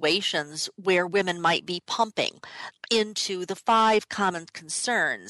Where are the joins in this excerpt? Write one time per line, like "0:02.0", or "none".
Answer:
0:02.7